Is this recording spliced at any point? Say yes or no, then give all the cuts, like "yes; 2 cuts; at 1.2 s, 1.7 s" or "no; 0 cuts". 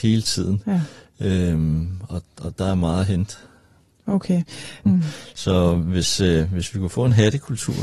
yes; 1 cut; at 4.9 s